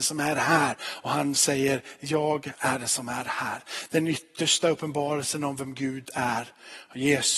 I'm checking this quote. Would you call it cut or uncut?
cut